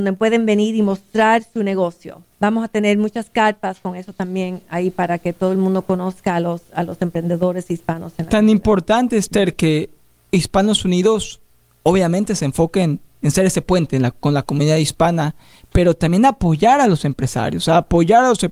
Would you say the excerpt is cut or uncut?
cut